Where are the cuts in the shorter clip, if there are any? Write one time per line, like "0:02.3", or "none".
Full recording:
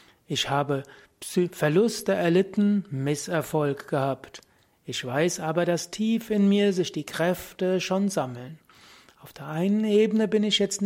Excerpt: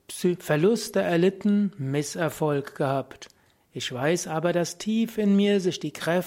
none